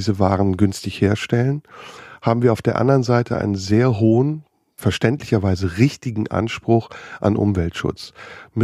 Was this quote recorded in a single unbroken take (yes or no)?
yes